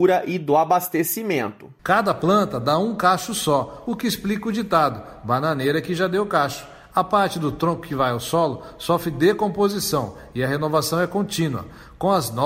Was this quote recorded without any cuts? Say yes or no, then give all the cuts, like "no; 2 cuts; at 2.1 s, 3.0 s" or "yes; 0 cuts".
yes; 0 cuts